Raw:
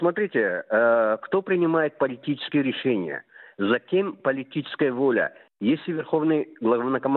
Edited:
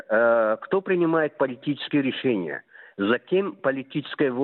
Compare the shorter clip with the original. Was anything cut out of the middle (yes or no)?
no